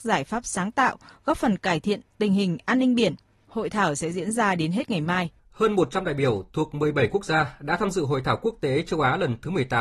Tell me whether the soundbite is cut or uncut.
cut